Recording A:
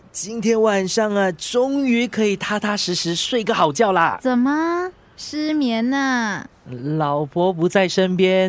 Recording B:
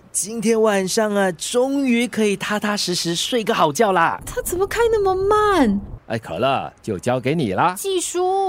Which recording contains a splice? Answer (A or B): B